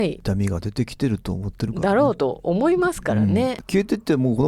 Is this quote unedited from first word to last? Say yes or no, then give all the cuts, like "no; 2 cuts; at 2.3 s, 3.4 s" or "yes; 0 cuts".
yes; 0 cuts